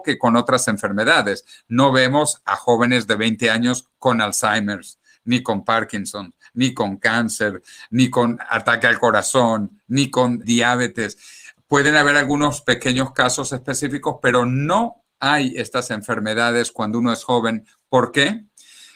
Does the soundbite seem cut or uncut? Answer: cut